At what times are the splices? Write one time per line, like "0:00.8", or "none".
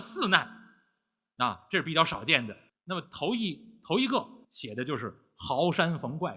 0:02.7
0:04.4